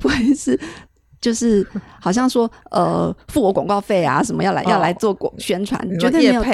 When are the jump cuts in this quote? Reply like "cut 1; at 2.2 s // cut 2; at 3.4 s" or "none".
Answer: none